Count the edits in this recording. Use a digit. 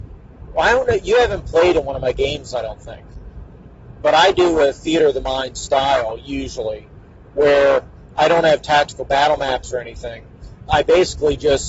2